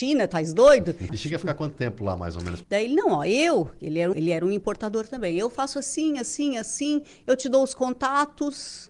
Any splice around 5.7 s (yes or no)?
no